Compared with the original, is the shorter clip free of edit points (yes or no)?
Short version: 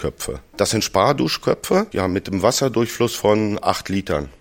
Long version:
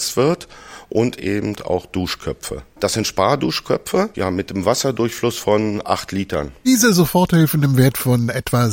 yes